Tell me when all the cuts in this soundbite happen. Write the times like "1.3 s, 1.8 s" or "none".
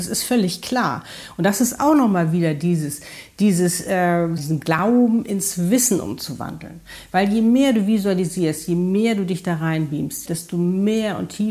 4.4 s, 10.2 s